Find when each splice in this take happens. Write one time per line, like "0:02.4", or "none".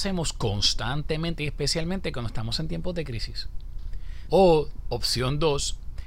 0:04.3